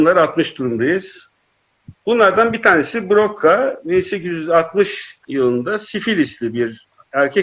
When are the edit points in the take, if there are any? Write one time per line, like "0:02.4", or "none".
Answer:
0:01.9

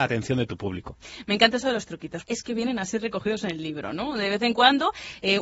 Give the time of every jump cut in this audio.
0:02.2

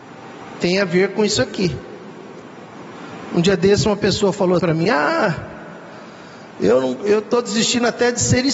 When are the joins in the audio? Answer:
0:04.6

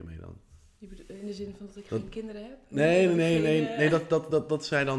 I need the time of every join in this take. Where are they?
none

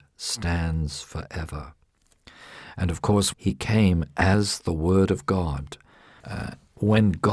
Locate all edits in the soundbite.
0:03.3
0:06.2

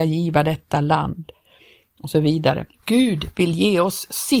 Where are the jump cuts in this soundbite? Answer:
0:02.7

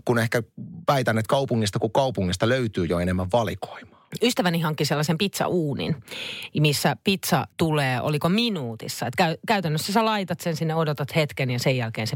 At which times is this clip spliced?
0:07.5

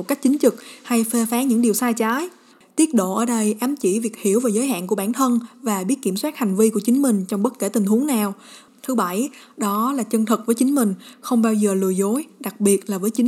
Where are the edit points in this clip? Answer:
0:02.6
0:08.7

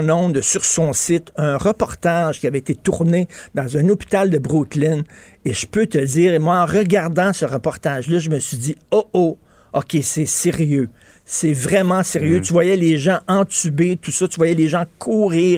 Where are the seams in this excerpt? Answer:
none

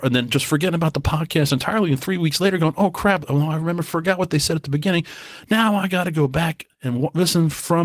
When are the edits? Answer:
none

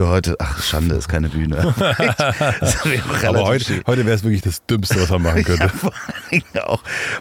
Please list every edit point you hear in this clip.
none

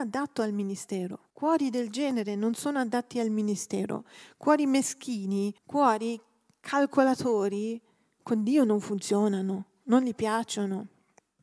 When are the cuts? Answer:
0:01.3
0:05.6

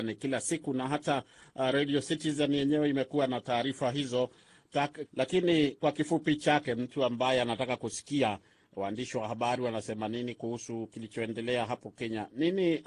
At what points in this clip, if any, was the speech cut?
0:05.1

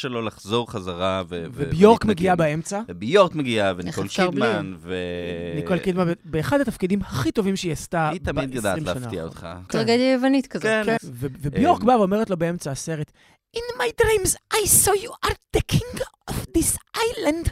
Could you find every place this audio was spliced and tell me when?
0:09.7
0:11.0

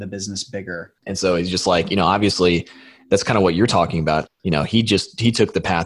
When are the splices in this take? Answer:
0:01.0
0:04.3

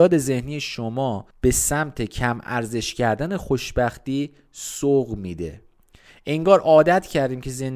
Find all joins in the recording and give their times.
0:01.3

